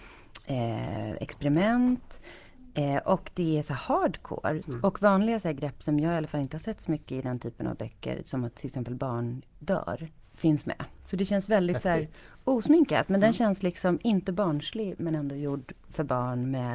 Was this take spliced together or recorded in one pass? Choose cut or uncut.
cut